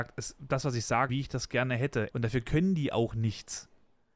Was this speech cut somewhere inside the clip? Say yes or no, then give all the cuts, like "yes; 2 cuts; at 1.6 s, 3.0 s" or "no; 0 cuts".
yes; 2 cuts; at 1.1 s, 2.1 s